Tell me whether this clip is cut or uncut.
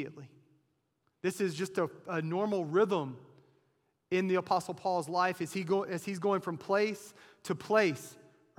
uncut